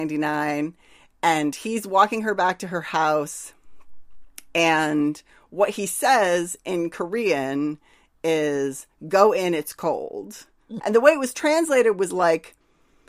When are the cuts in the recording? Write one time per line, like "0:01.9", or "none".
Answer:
0:10.8

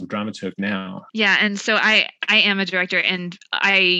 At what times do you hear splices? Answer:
0:01.1

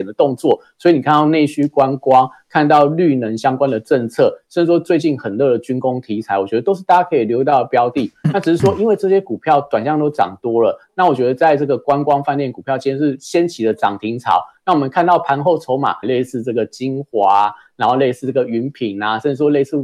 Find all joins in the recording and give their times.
0:16.0

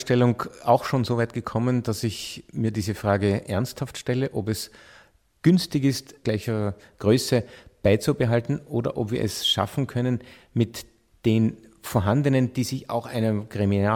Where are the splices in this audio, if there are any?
0:06.2

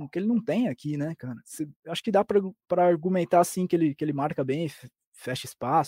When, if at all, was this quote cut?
none

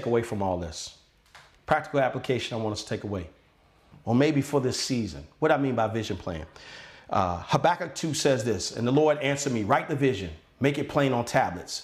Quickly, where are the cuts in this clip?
0:03.9

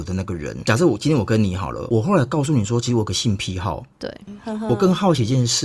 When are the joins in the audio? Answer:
0:03.9

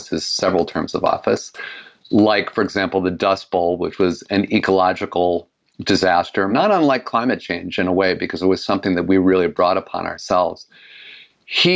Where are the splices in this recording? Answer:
0:06.5

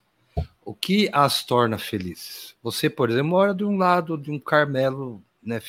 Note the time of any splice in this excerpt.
none

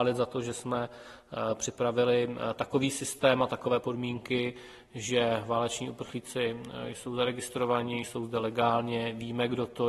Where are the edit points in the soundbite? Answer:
none

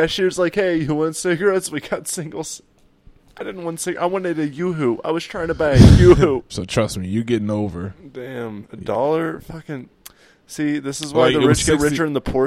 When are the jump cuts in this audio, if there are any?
0:06.5

